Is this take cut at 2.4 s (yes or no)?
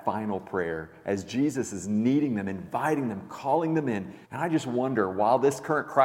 no